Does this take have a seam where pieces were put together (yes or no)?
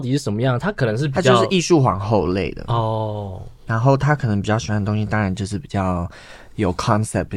no